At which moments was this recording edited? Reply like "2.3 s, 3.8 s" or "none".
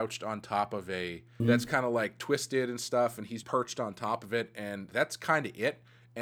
1.4 s, 3.4 s